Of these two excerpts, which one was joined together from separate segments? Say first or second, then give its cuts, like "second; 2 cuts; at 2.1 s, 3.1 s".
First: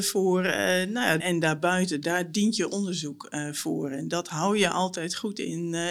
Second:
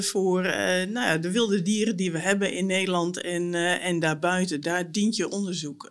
first; 1 cut; at 1.2 s